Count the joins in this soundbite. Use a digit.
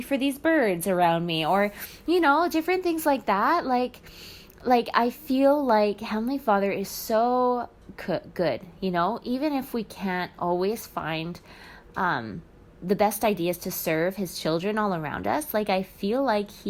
0